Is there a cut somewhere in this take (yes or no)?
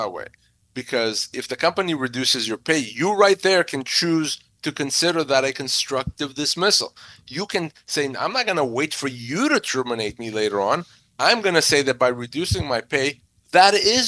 no